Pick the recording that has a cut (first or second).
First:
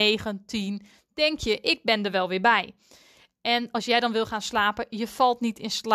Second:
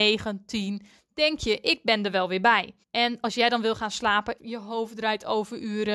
second